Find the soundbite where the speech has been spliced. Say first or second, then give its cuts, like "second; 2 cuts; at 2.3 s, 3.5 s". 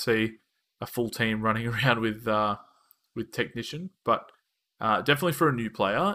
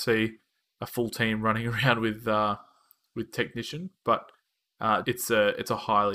second; 1 cut; at 5.0 s